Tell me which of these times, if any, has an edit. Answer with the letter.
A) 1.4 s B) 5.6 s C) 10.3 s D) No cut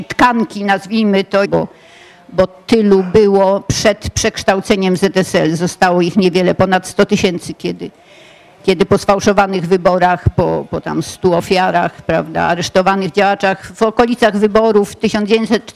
A